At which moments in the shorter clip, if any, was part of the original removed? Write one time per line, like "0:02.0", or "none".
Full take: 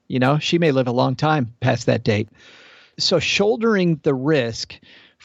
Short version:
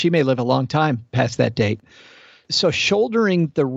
none